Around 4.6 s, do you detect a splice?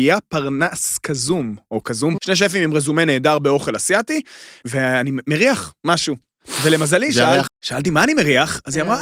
yes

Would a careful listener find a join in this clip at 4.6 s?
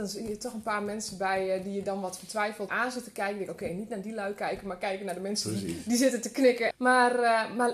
no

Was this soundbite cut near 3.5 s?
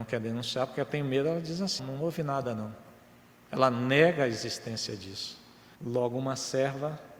no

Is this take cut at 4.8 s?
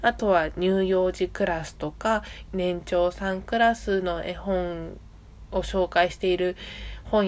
no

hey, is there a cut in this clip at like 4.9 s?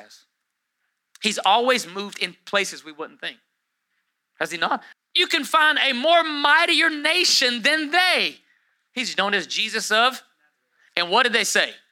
yes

